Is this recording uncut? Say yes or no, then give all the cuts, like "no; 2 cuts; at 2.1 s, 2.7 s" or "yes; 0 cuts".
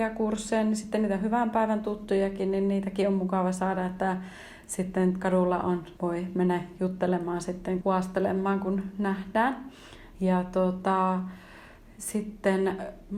no; 3 cuts; at 6.0 s, 7.8 s, 10.1 s